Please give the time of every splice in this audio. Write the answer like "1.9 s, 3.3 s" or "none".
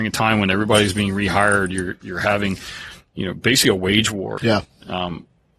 4.4 s